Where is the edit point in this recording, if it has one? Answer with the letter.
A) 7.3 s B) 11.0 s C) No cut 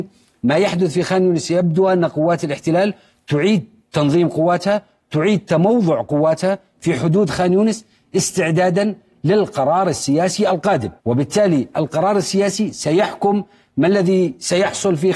B